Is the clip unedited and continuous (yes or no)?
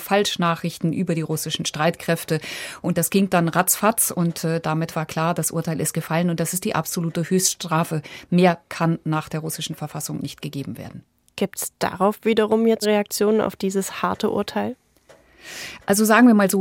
no